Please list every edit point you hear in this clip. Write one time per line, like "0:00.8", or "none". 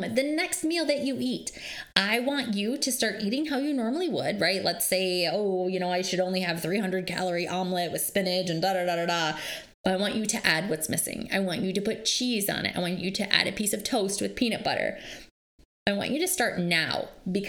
0:09.7